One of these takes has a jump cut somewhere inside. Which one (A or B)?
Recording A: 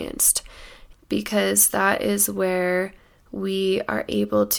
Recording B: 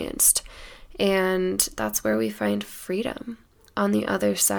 A